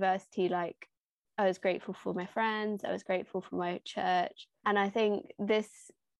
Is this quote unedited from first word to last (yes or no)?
no